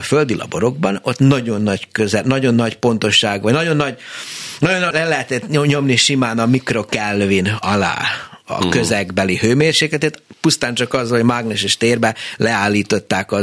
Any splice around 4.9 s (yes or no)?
yes